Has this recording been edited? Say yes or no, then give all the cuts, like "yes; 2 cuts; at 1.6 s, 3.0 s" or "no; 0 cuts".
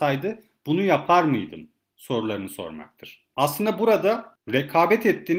yes; 1 cut; at 3.3 s